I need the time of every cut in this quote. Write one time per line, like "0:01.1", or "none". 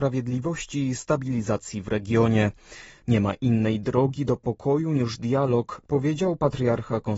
0:03.0
0:05.9